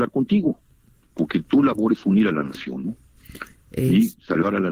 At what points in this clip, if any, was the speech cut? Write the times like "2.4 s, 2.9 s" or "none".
1.0 s

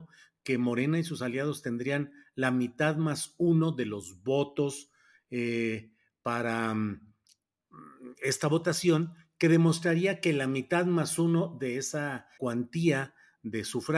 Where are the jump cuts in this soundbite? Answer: 12.4 s

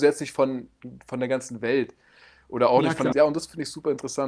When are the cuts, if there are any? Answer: 3.1 s

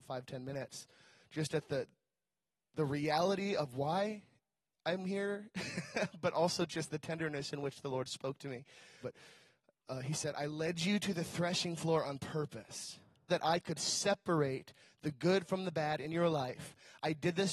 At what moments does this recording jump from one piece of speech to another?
9.0 s, 13.3 s

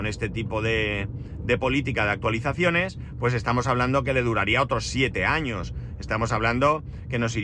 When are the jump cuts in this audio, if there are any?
none

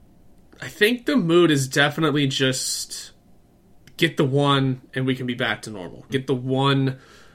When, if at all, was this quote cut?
6.1 s

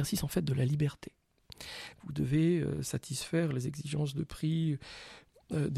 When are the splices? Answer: 1.9 s

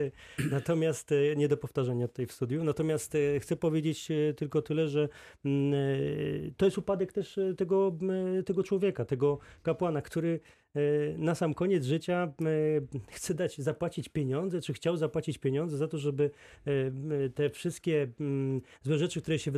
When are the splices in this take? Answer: none

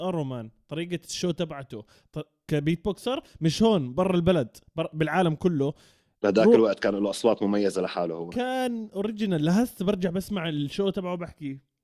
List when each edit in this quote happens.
2.5 s

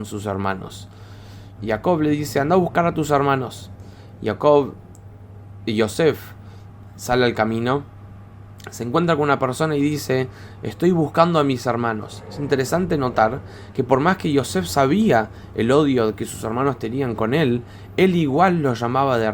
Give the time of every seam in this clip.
1.6 s

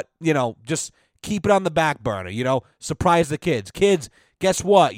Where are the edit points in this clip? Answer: none

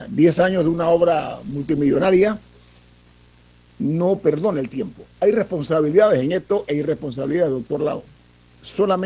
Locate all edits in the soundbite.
5.2 s

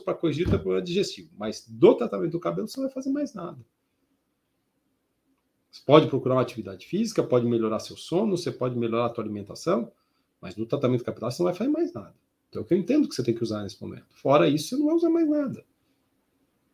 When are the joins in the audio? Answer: 12.5 s

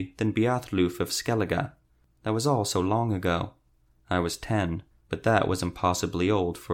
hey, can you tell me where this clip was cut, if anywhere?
4.9 s

